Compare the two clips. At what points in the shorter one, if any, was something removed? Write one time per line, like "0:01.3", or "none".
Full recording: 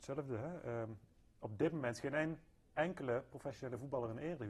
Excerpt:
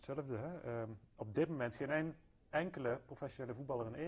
0:01.1